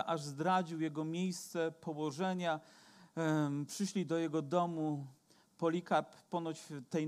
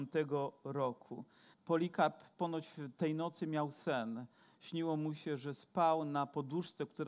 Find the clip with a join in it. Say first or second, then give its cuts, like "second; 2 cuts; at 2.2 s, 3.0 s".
second; 1 cut; at 1.5 s